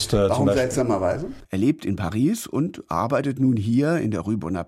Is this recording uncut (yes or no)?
no